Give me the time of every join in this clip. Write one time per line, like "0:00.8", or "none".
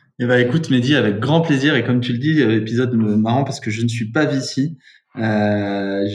none